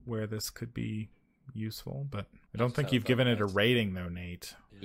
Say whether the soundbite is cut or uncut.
uncut